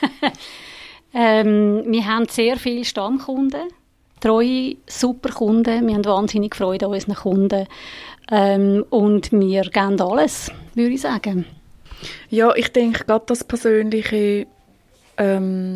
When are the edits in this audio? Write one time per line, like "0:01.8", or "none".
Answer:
none